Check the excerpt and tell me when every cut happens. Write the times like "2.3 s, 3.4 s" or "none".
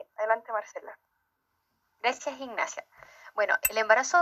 none